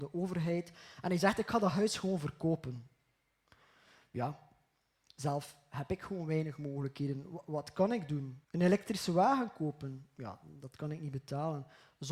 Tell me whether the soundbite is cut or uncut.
cut